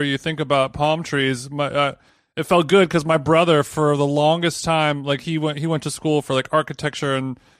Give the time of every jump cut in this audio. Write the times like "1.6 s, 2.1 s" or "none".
none

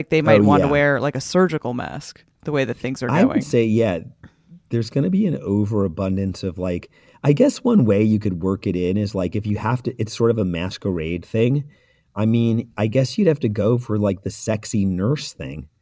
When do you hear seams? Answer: 2.3 s

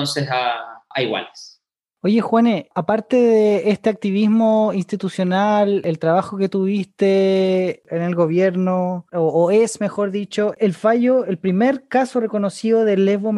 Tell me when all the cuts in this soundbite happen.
9.1 s, 10.5 s

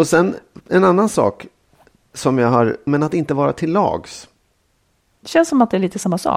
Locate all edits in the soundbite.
2.9 s

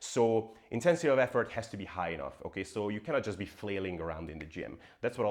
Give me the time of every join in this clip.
none

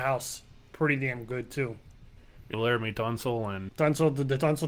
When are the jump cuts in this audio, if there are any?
2.5 s, 3.7 s

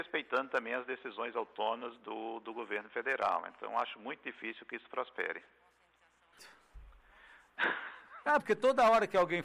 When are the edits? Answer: 6.4 s, 8.4 s

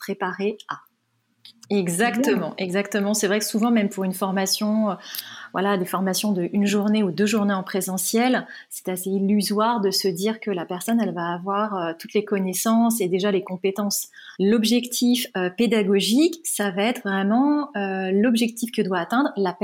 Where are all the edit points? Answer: 1.6 s, 14.3 s

